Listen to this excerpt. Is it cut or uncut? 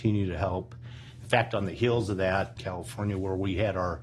cut